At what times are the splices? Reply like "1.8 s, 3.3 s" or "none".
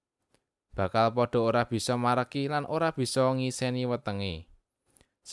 none